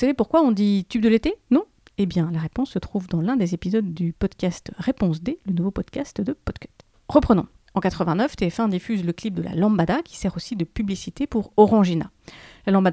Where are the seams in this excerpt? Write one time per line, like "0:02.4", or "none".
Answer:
none